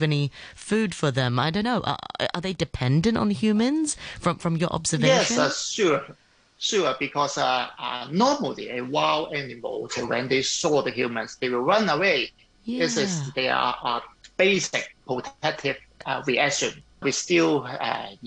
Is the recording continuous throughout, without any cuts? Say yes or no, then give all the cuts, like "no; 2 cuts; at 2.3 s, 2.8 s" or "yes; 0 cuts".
no; 1 cut; at 17.0 s